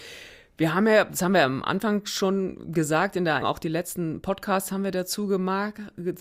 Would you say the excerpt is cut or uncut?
cut